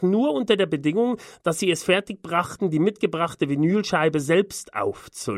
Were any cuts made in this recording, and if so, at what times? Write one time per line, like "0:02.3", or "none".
none